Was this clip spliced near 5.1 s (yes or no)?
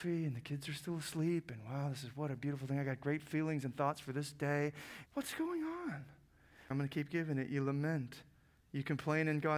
yes